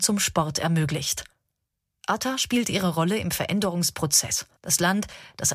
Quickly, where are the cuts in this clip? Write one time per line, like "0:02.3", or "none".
0:04.6